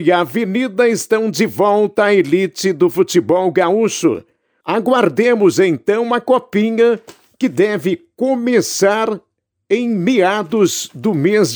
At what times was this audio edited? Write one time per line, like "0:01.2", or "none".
0:04.6

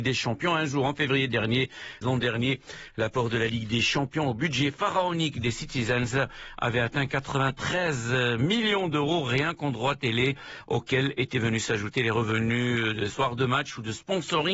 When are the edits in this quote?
0:02.0

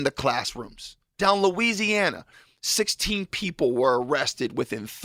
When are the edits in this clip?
0:01.2

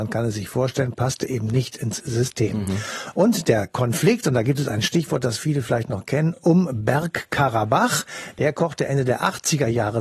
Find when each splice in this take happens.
none

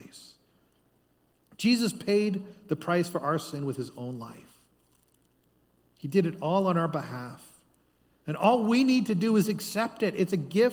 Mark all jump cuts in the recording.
none

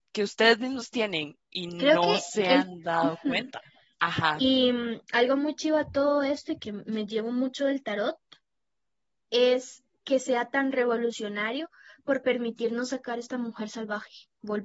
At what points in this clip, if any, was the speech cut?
0:03.9

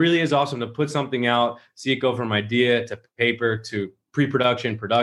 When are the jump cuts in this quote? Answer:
none

